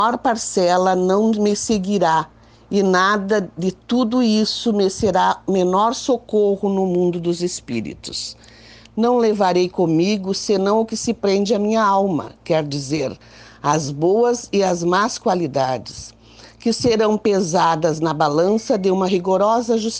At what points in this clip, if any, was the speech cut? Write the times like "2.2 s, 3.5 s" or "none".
none